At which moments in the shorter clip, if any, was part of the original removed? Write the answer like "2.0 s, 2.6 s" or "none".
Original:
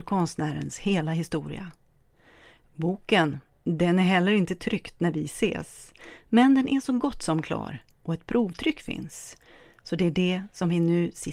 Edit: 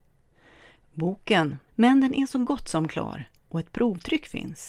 1.7 s